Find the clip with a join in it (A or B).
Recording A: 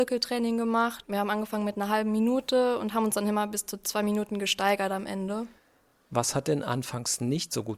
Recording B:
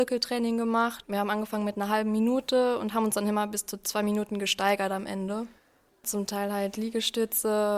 B